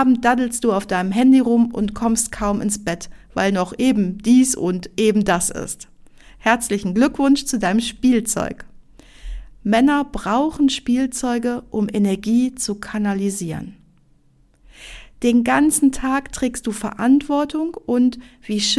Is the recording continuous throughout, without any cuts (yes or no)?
yes